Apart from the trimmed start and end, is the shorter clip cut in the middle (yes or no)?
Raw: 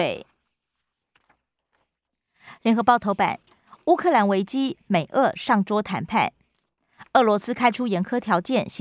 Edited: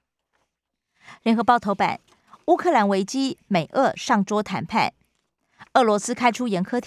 no